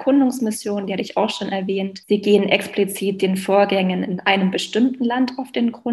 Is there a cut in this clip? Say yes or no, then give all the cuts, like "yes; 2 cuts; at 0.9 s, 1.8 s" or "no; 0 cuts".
no; 0 cuts